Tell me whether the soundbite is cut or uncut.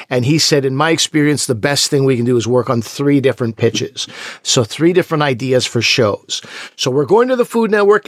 uncut